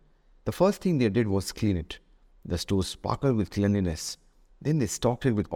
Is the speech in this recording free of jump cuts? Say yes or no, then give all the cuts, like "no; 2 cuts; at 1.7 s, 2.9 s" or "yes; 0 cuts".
yes; 0 cuts